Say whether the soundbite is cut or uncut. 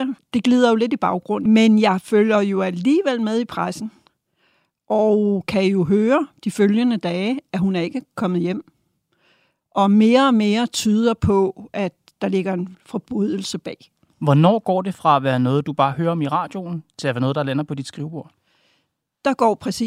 cut